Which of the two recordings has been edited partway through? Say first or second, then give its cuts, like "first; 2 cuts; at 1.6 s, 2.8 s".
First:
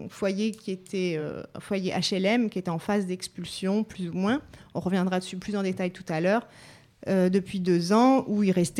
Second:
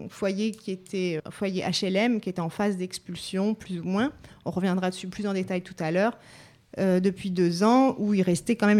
second; 1 cut; at 1.2 s